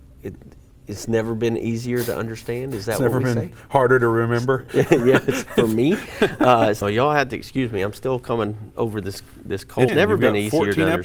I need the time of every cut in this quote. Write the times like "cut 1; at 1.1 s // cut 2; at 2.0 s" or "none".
cut 1; at 6.8 s // cut 2; at 9.9 s